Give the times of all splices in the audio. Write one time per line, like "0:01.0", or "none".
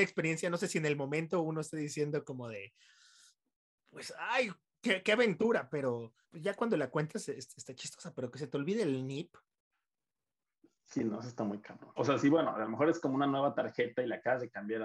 0:06.2
0:12.0